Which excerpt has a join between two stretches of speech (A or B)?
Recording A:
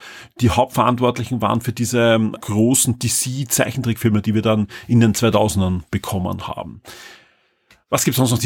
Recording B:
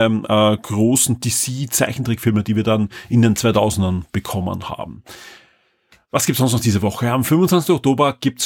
A